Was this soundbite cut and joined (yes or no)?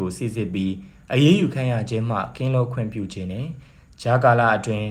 no